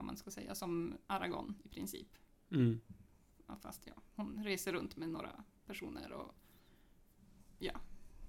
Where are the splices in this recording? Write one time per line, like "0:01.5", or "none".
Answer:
0:04.1